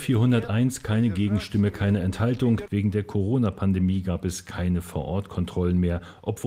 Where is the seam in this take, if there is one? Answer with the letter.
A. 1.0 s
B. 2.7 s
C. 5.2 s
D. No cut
B